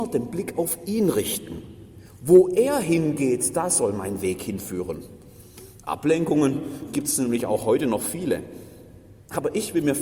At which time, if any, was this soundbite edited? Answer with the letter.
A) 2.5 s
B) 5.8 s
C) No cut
C